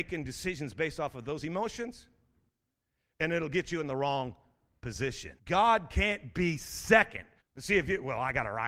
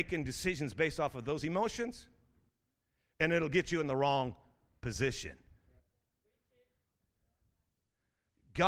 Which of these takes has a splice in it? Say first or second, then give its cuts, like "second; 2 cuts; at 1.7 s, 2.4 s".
first; 2 cuts; at 5.4 s, 7.4 s